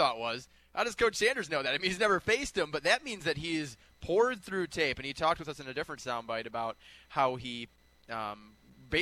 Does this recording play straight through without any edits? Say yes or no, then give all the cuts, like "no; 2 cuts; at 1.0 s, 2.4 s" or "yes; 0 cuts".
yes; 0 cuts